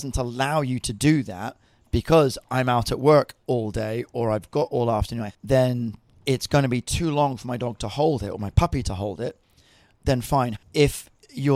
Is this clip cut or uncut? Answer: cut